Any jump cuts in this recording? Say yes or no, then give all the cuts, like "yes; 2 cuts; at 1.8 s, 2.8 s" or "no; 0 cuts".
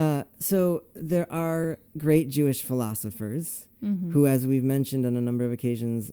yes; 1 cut; at 1.9 s